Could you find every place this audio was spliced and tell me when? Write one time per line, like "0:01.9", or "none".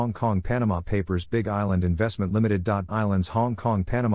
0:02.9